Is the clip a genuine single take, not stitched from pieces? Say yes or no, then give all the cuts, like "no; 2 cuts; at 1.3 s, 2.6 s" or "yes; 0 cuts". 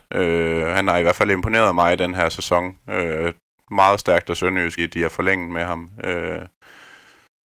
no; 1 cut; at 4.8 s